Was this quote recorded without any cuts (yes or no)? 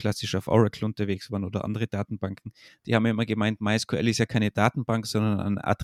yes